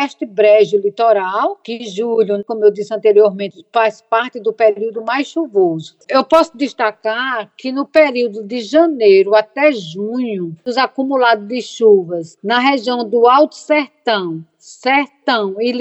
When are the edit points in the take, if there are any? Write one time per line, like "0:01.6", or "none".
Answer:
0:06.0